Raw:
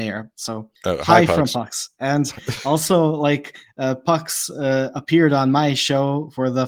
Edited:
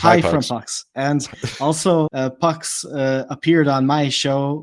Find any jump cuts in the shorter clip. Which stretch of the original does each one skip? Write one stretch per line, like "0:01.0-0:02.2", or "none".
0:03.1-0:03.7